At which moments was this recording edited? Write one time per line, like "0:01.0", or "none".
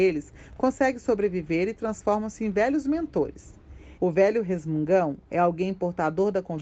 0:04.0

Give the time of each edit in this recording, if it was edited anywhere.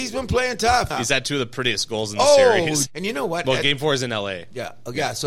0:00.9
0:02.9

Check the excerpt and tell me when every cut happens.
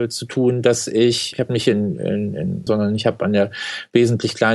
0:01.3
0:02.7

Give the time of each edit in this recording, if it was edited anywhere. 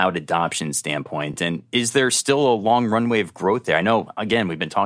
none

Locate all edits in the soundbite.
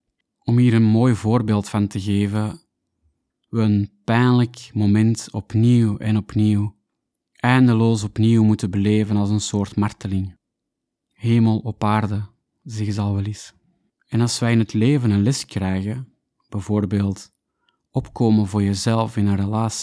0:03.3
0:11.0
0:13.9

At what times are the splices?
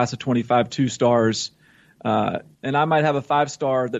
0:02.5

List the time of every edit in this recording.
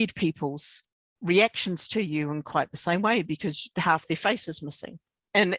none

